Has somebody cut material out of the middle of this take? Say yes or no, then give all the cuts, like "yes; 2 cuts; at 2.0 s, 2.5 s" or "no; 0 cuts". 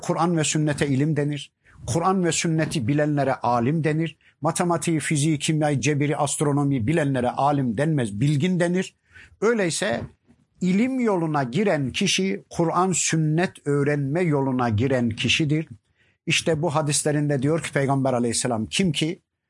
no; 0 cuts